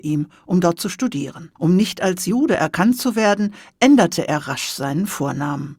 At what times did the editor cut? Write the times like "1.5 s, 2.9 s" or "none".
1.6 s

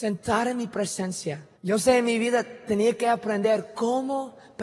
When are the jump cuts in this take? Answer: 1.6 s

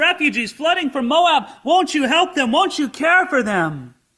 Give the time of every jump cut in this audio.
none

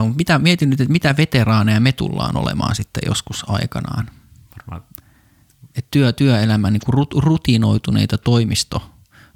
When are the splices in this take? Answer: none

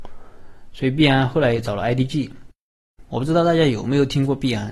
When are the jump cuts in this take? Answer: 3.0 s

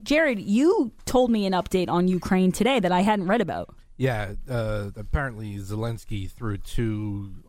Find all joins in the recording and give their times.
none

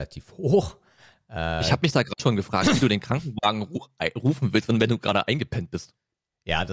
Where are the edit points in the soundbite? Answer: 2.2 s

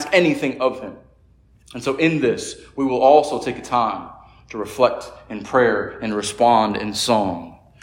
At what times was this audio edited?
none

